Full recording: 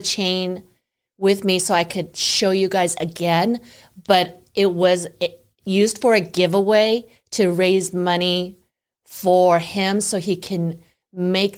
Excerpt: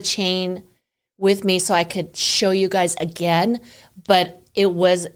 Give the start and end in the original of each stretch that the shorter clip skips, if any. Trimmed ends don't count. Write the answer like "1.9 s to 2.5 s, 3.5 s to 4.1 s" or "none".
none